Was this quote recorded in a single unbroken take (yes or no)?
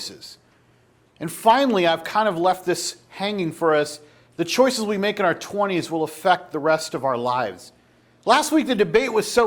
yes